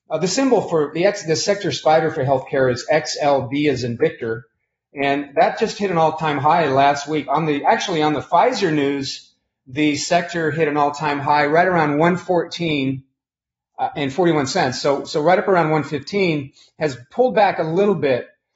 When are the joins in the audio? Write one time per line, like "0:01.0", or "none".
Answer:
none